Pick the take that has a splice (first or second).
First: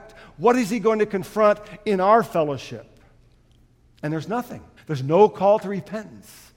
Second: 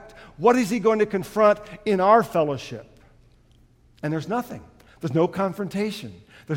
first